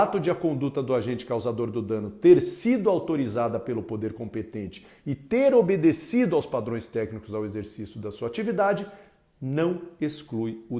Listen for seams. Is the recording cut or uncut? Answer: uncut